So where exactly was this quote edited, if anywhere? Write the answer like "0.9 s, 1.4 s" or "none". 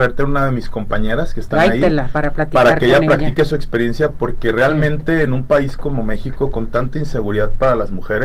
none

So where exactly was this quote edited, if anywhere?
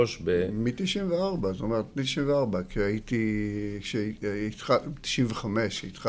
none

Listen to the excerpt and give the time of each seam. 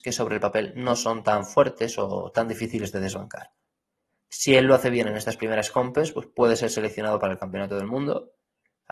none

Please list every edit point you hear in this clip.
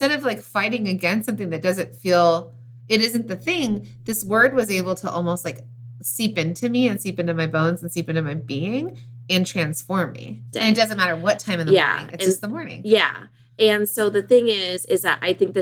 10.5 s

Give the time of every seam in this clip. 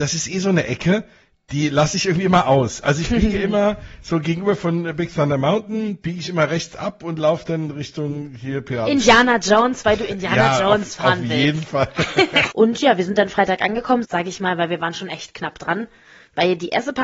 12.5 s, 14.0 s

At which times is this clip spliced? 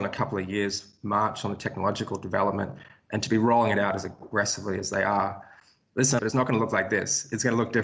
6.2 s

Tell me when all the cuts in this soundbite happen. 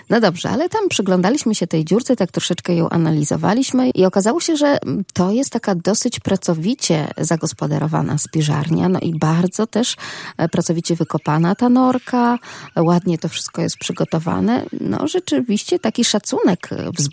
3.9 s

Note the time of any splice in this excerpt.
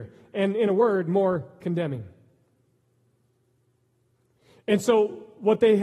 none

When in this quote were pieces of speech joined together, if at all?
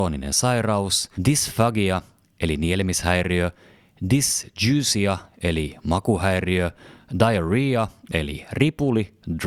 1.1 s

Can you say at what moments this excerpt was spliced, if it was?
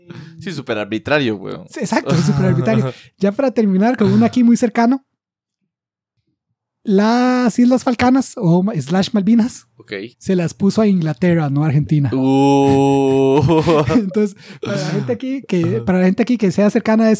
10.1 s

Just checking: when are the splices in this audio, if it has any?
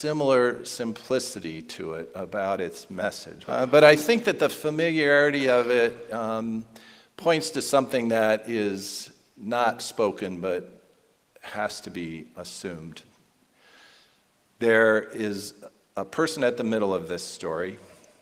3.4 s

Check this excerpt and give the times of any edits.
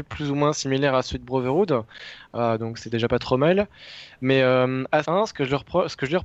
5.0 s

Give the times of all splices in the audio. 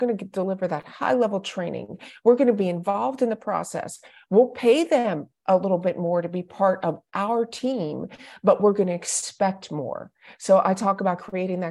none

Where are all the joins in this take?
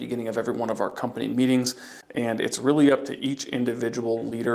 2.0 s

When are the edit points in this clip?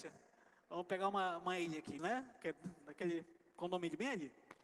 2.0 s

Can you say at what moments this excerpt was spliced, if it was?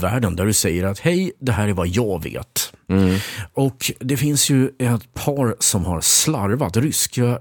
none

